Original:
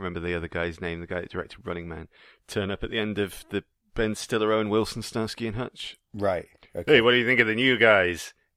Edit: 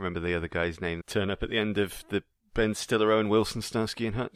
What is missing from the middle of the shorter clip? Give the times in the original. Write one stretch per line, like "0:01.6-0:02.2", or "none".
0:01.0-0:02.4